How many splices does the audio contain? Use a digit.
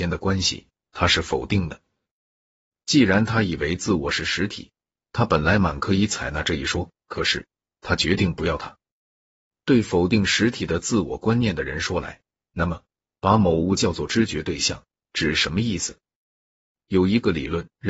2